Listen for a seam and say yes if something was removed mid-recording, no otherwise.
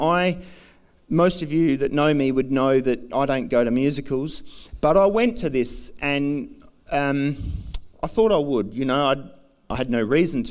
no